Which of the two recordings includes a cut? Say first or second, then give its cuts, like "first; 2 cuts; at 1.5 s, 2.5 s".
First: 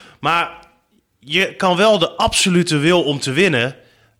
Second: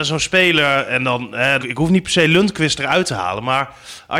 second; 1 cut; at 1.6 s